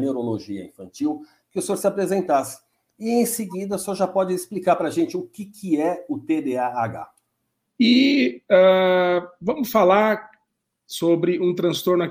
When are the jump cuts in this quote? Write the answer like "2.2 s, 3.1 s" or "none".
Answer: 7.7 s